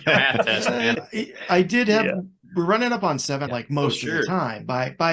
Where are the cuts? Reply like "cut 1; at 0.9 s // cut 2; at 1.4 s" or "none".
cut 1; at 0.9 s // cut 2; at 3.5 s